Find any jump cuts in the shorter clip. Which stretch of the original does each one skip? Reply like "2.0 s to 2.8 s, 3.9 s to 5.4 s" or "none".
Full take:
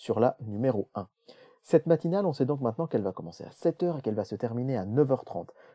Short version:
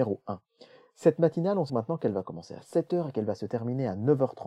2.4 s to 2.6 s